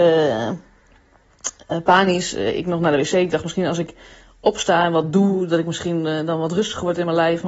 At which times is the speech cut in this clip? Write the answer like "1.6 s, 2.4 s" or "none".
none